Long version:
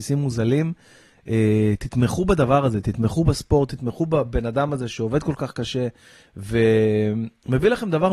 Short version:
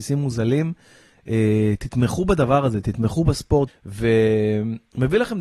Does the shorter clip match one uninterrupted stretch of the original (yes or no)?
no